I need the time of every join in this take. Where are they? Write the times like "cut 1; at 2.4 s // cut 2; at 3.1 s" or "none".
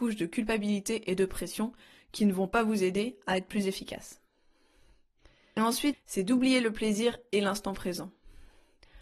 cut 1; at 5.9 s